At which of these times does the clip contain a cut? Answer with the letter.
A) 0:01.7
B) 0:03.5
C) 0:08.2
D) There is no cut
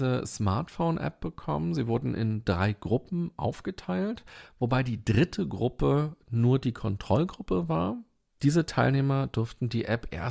D